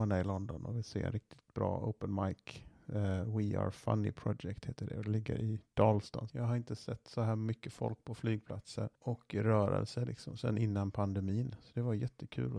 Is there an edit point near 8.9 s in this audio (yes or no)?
yes